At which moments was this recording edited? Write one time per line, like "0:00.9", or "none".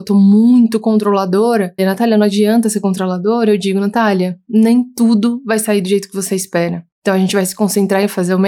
0:01.8